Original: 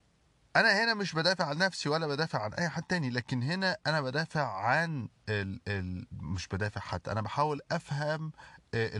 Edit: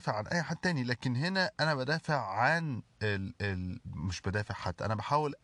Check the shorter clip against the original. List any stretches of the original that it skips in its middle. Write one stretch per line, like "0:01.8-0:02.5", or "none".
none